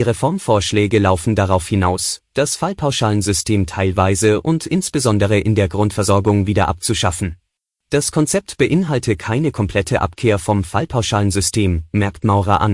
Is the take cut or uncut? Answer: cut